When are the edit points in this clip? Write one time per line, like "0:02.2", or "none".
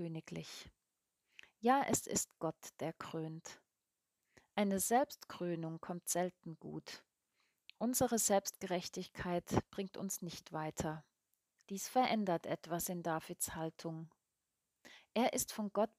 0:11.6